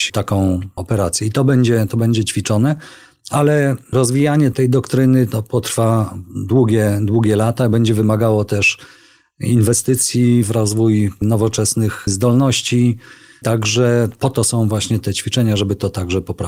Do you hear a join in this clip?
no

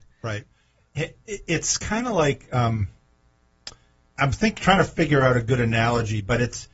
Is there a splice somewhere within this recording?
yes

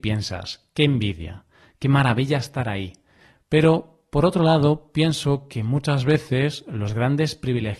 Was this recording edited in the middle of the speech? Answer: no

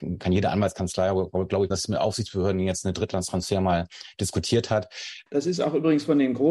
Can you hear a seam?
yes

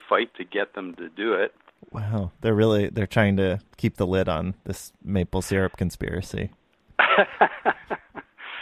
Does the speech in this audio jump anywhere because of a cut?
no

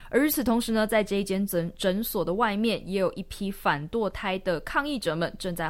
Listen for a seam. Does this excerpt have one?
no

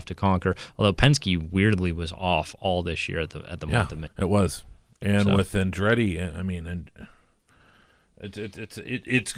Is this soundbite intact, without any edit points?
no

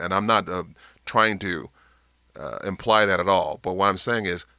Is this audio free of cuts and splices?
yes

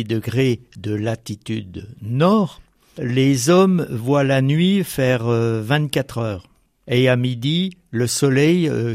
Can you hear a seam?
no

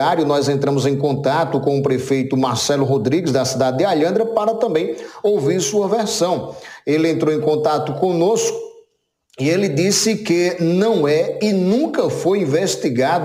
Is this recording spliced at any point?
no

